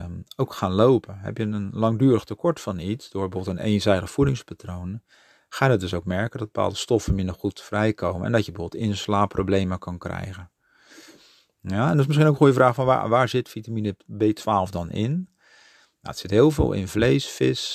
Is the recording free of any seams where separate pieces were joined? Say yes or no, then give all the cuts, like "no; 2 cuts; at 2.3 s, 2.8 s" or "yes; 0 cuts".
yes; 0 cuts